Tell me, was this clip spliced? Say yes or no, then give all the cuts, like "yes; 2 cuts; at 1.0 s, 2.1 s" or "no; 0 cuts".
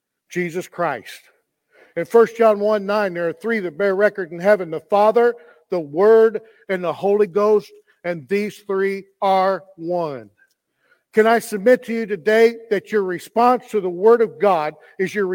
no; 0 cuts